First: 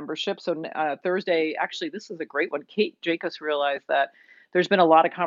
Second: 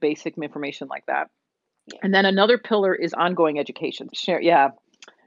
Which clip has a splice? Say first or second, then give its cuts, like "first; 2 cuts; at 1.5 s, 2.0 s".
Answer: second; 1 cut; at 4.1 s